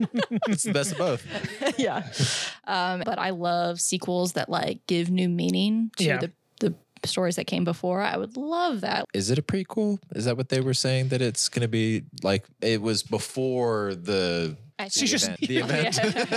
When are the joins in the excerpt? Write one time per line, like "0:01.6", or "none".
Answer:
0:03.0
0:09.0
0:15.4